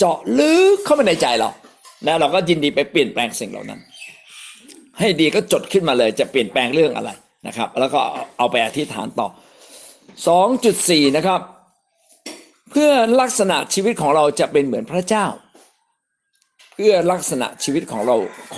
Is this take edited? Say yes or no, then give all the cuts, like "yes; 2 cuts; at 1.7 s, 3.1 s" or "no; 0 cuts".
no; 0 cuts